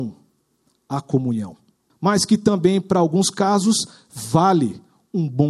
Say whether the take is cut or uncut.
cut